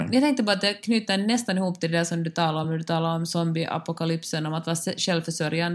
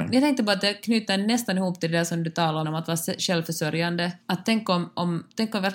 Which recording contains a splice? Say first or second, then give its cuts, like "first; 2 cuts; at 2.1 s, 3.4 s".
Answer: second; 2 cuts; at 2.6 s, 4.2 s